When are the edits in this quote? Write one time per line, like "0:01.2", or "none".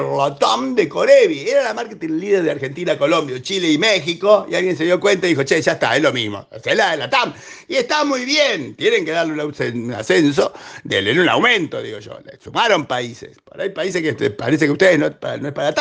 none